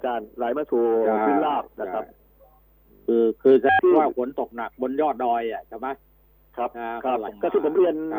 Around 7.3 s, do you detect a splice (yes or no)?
yes